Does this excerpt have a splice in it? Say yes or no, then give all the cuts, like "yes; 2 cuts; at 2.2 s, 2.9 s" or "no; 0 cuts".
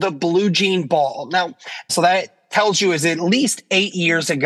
yes; 1 cut; at 1.9 s